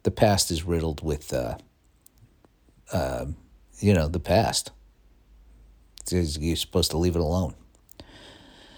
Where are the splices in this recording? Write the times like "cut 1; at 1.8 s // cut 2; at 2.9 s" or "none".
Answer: none